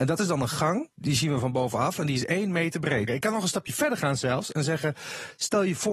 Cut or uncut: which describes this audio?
cut